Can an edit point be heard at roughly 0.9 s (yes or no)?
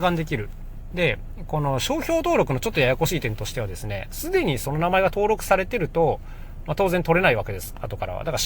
yes